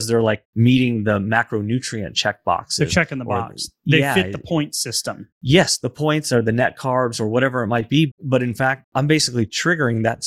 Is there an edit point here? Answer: no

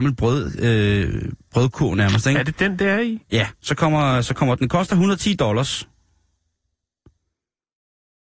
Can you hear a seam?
no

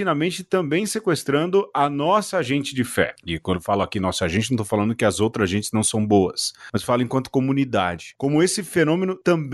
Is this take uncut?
yes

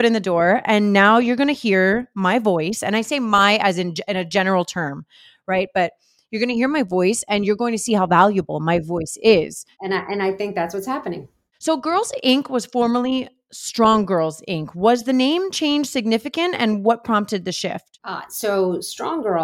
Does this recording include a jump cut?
no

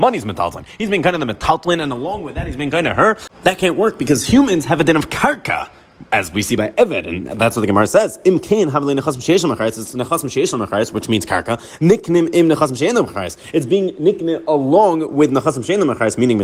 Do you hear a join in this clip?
no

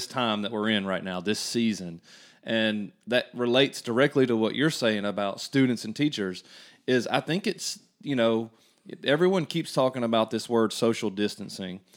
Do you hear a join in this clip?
no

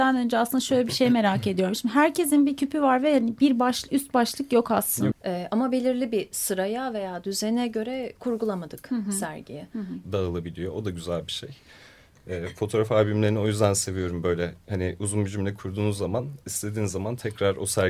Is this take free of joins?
no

